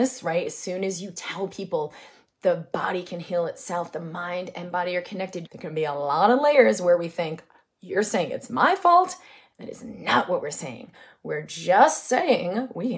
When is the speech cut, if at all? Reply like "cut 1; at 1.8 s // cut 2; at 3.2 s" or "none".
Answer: cut 1; at 5.5 s

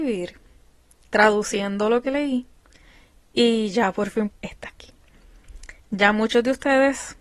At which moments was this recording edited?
cut 1; at 4.3 s // cut 2; at 5.8 s

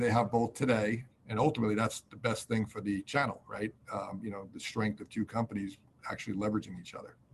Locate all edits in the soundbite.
cut 1; at 1.1 s

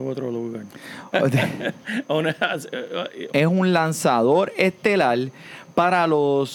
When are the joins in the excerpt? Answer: cut 1; at 1.1 s // cut 2; at 3.3 s

